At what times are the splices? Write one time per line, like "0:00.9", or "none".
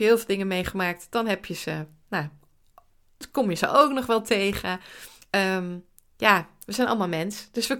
none